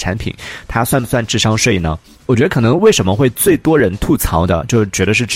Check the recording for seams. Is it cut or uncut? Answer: uncut